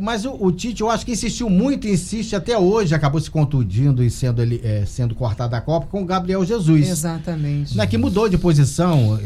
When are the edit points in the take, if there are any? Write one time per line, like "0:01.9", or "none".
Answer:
none